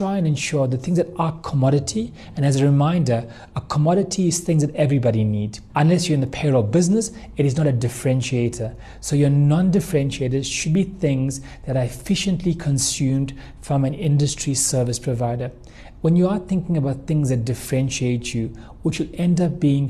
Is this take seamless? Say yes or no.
no